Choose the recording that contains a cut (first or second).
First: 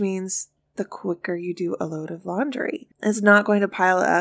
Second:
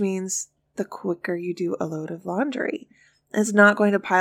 first